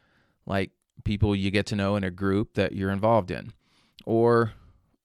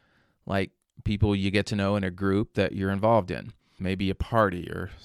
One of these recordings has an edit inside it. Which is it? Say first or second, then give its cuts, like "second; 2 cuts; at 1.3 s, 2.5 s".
second; 1 cut; at 3.8 s